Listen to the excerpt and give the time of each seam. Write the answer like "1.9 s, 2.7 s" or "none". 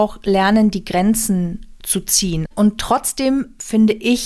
2.5 s